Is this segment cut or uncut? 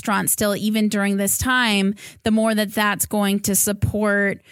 uncut